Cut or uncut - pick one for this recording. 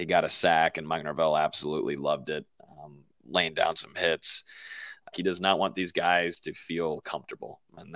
cut